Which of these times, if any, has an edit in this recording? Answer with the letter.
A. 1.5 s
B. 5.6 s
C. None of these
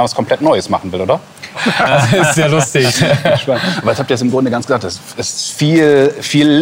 A